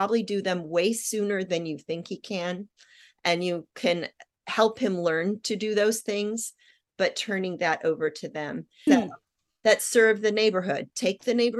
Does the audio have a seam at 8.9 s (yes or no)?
yes